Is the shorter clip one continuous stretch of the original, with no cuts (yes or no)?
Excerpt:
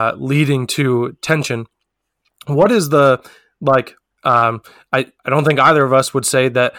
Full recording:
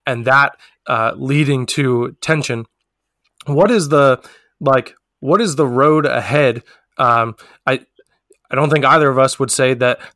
no